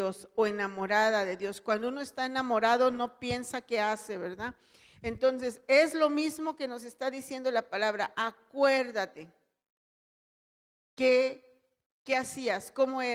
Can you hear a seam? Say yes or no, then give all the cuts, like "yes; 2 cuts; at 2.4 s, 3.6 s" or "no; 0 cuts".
no; 0 cuts